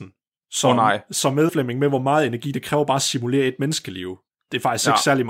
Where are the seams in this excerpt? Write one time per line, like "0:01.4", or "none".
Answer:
0:01.5